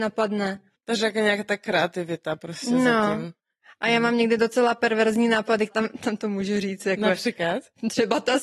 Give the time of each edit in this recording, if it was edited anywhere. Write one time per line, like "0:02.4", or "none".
0:05.7